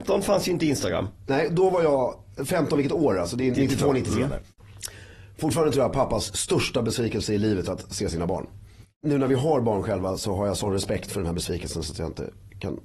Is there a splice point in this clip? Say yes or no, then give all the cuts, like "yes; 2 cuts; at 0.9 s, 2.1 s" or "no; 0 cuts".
yes; 1 cut; at 3.5 s